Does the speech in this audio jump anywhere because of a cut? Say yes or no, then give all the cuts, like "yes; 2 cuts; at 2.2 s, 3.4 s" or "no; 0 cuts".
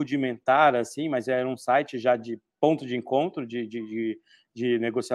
no; 0 cuts